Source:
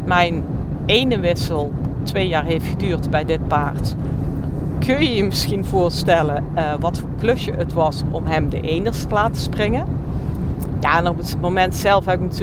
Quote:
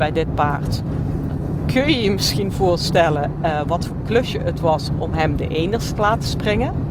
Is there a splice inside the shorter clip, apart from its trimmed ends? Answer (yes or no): no